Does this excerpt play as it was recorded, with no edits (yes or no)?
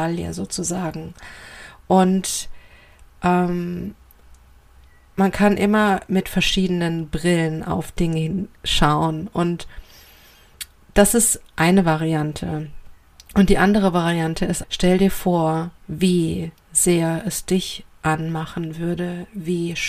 no